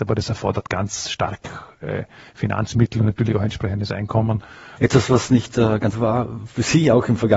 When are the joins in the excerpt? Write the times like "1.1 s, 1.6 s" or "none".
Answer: 4.8 s, 5.9 s